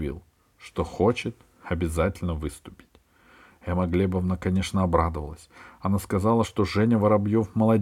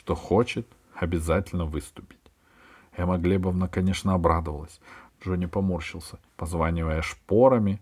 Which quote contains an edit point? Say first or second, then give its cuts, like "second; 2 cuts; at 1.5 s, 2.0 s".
second; 2 cuts; at 5.1 s, 6.3 s